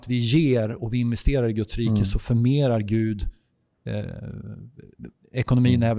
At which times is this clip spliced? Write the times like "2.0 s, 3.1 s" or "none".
none